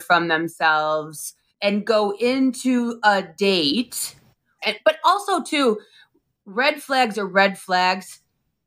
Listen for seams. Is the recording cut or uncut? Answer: cut